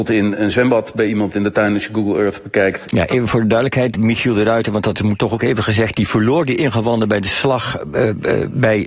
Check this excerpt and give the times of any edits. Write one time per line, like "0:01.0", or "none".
0:02.8
0:03.9